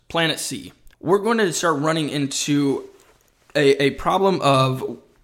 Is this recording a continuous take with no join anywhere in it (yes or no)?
no